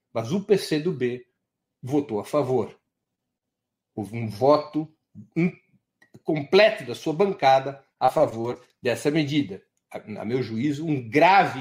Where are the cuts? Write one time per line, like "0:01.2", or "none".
none